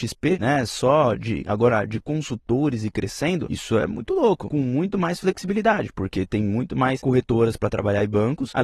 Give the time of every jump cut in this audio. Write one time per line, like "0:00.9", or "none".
none